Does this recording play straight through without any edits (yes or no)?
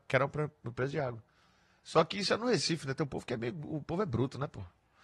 yes